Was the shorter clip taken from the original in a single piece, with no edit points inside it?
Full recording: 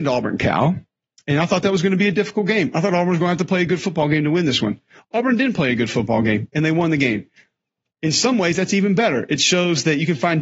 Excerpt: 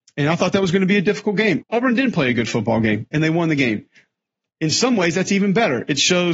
no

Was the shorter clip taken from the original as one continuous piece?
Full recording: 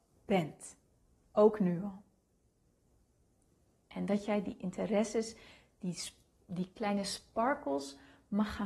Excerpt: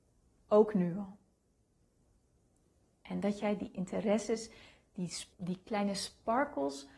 no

